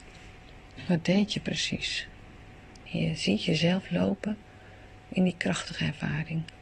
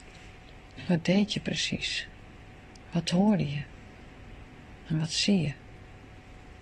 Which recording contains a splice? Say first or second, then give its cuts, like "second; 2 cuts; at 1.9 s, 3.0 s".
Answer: first; 1 cut; at 2.9 s